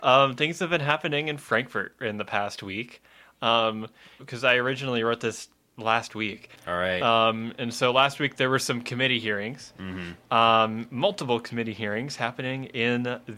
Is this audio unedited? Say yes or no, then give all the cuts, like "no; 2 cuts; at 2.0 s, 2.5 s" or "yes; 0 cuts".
no; 2 cuts; at 4.2 s, 6.6 s